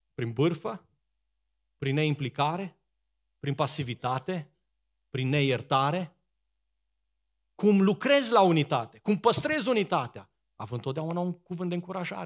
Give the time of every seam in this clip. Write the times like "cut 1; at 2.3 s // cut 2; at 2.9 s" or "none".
none